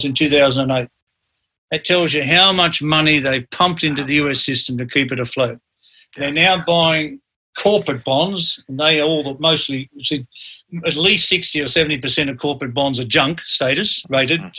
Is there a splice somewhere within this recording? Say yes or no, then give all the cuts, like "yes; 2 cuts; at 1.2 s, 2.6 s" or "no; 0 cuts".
no; 0 cuts